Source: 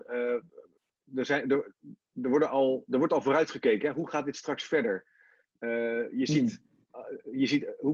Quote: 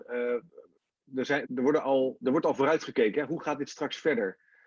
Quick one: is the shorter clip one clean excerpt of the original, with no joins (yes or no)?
no